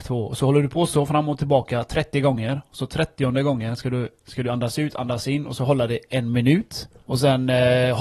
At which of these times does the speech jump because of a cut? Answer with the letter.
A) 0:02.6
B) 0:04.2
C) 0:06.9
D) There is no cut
C